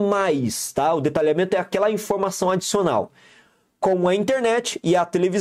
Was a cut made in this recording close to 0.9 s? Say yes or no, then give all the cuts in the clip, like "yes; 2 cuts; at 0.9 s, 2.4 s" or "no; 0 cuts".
no; 0 cuts